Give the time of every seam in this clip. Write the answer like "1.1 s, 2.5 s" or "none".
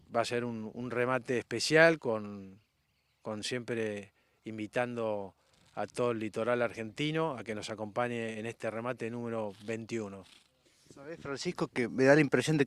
none